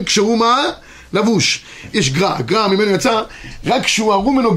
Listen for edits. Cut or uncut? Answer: cut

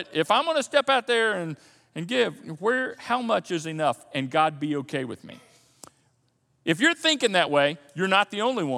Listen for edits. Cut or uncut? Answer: uncut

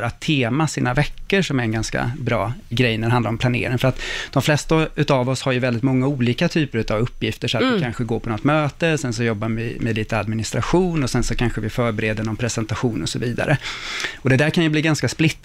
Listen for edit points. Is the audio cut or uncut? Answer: cut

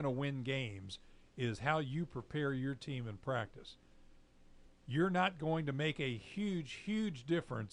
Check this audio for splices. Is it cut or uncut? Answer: uncut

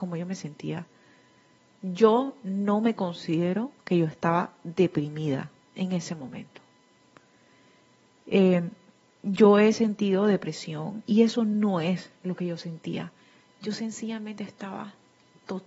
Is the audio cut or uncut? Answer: cut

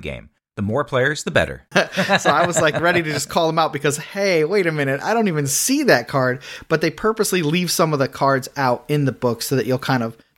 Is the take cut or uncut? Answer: cut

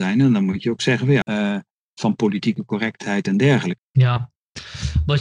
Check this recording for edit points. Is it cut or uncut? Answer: cut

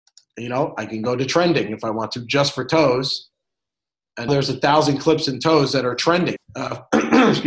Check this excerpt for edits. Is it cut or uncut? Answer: cut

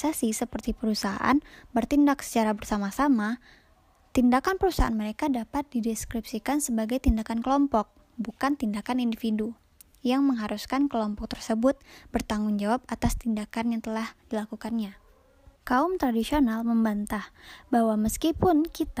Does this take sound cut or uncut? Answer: cut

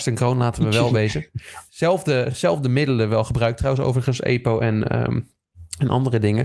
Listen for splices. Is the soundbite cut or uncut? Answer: uncut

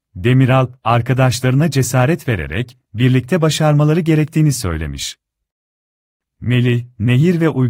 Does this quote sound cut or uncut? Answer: uncut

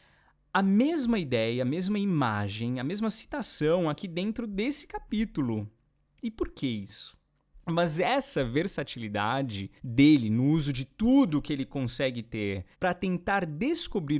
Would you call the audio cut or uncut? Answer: cut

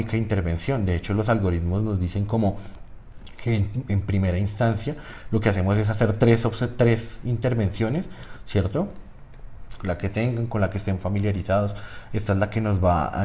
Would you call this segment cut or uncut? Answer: cut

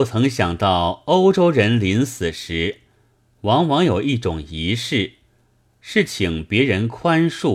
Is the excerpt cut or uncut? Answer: uncut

